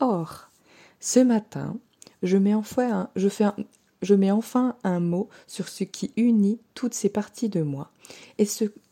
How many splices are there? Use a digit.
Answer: 0